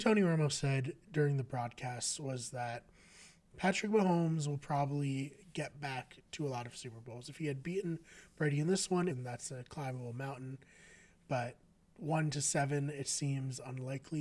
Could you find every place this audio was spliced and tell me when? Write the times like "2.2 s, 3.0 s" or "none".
9.1 s